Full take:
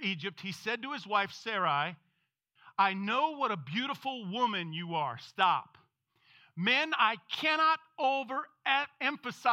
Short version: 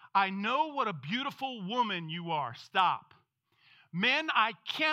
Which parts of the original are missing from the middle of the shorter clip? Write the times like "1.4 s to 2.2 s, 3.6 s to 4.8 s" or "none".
none